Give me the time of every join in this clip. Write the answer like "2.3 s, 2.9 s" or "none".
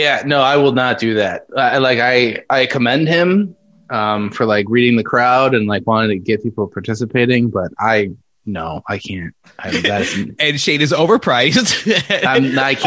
none